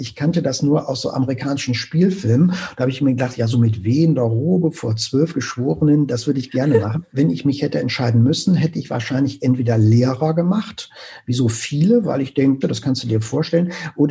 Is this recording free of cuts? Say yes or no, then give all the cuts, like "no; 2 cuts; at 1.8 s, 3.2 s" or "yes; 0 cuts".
no; 2 cuts; at 7.1 s, 12.6 s